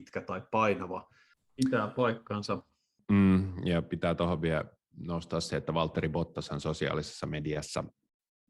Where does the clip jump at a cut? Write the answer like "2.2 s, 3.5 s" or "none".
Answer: 1.3 s, 3.0 s

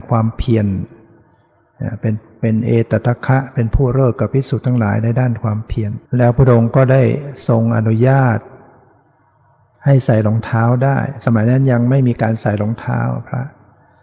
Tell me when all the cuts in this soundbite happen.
3.2 s, 6.1 s

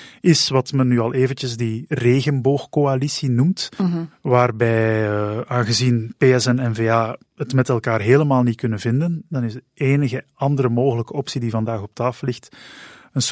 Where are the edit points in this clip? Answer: 7.3 s

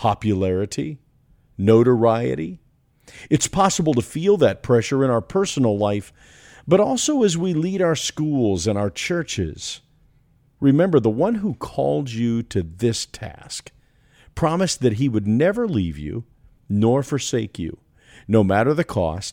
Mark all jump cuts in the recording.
10.6 s

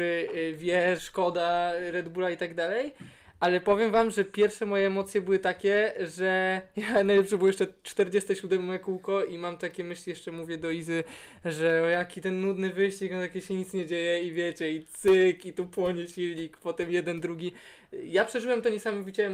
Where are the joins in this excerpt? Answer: 1.0 s

